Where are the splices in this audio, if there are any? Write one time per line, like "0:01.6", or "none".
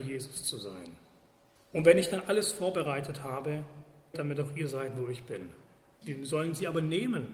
0:01.6
0:04.1
0:06.0